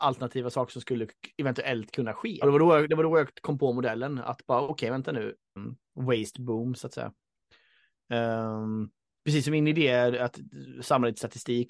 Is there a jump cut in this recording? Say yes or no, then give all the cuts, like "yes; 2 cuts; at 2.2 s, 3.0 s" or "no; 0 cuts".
yes; 2 cuts; at 2.4 s, 5.6 s